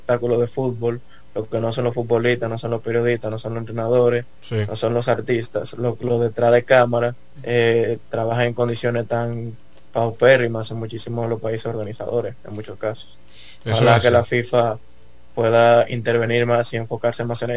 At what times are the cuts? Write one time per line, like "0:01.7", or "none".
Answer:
none

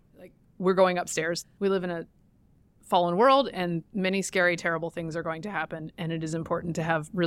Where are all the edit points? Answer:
0:01.4

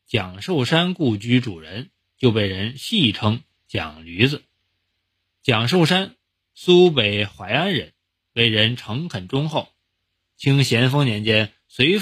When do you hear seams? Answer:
none

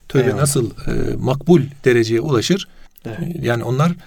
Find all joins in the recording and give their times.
0:02.9

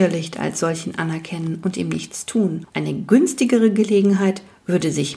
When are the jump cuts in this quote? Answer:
0:02.7

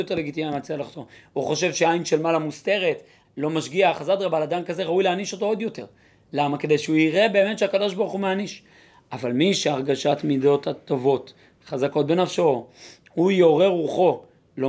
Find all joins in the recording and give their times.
0:03.2

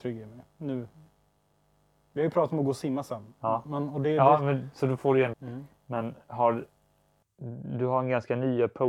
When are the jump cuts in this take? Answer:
0:05.3

